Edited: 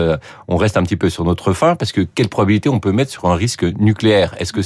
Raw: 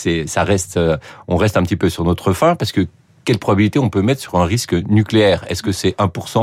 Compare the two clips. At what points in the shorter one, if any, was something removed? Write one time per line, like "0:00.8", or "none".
0:02.1